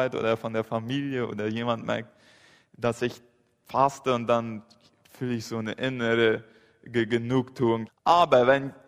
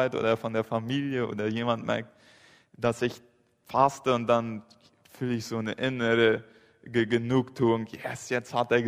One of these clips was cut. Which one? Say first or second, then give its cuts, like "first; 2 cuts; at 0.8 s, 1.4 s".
first; 1 cut; at 7.9 s